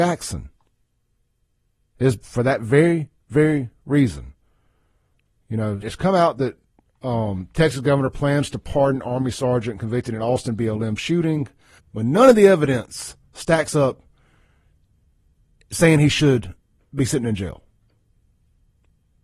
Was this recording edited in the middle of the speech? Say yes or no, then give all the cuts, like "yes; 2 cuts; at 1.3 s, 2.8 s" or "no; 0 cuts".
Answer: yes; 2 cuts; at 5.8 s, 11.8 s